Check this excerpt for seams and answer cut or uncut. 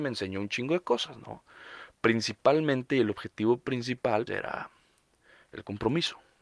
cut